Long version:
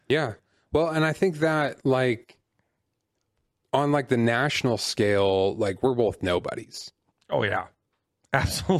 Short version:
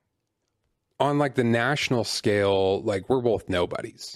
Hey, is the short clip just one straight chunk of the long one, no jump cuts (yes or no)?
yes